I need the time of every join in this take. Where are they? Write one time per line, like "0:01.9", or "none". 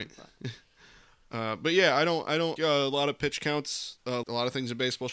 0:02.6
0:04.2

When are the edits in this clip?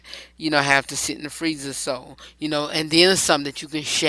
none

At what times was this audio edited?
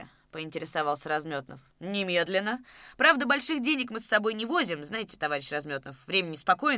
0:01.7

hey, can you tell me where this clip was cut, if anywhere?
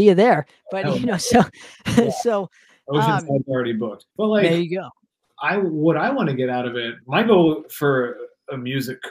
0:04.1
0:07.0

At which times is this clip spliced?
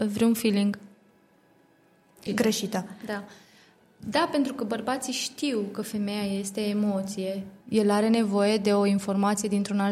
0:02.3
0:07.6

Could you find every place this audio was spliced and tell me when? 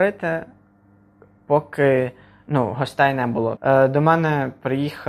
0:03.6

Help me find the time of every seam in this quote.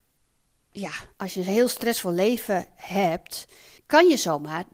0:03.8

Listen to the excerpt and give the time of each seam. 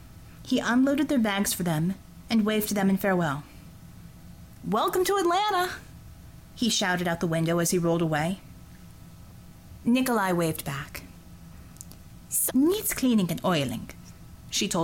0:02.2
0:12.5

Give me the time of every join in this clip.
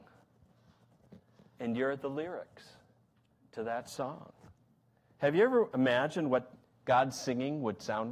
none

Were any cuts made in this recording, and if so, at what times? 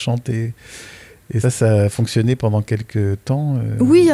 0:01.4

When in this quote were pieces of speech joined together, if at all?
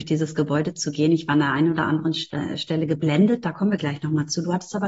none

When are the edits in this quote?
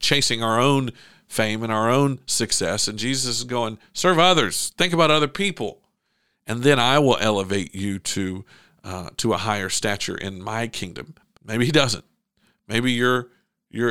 0:11.4

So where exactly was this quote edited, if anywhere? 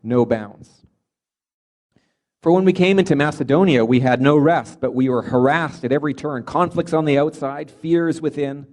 none

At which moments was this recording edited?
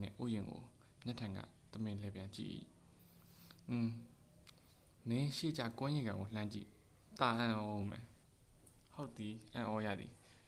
0:08.2

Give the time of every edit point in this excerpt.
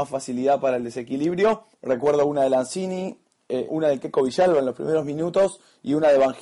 0:01.7
0:03.7

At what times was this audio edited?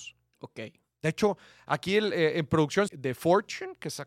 0:02.9

